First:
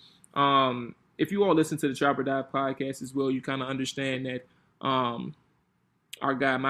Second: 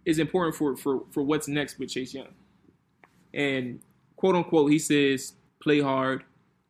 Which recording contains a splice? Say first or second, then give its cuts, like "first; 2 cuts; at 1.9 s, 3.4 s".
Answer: second; 1 cut; at 5.5 s